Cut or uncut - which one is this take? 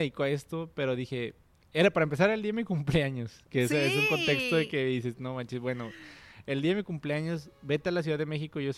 uncut